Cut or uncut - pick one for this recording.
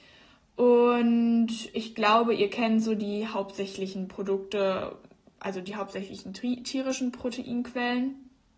uncut